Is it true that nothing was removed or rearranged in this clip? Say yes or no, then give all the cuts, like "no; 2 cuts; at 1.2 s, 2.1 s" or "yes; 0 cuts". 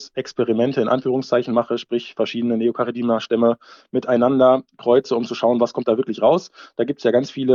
yes; 0 cuts